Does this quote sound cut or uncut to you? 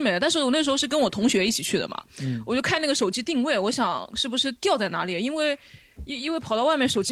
cut